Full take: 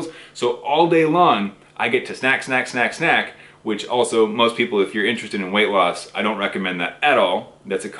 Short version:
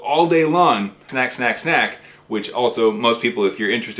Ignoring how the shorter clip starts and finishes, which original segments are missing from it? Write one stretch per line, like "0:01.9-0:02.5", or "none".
0:01.7-0:02.4